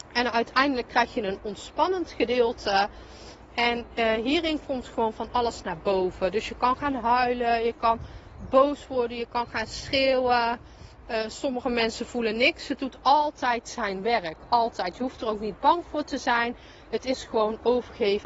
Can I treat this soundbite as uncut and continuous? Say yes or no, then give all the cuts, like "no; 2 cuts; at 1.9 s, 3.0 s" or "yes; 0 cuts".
yes; 0 cuts